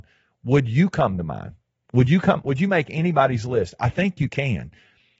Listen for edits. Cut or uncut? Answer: uncut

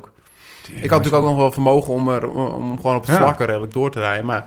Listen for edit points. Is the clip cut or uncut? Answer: uncut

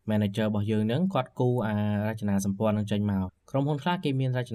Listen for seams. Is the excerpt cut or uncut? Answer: cut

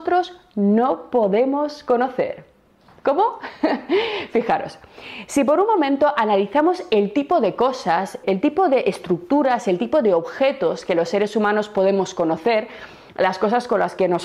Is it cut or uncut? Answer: uncut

